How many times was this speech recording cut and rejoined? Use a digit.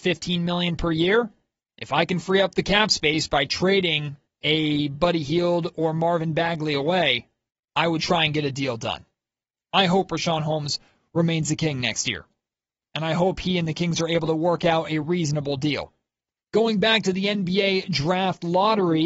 1